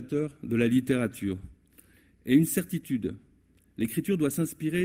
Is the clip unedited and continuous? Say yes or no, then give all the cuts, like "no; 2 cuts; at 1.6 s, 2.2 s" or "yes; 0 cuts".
yes; 0 cuts